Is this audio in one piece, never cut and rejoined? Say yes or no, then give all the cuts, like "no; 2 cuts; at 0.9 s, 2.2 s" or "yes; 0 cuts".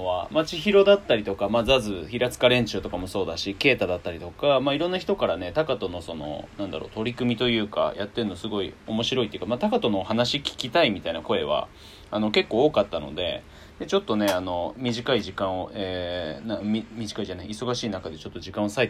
yes; 0 cuts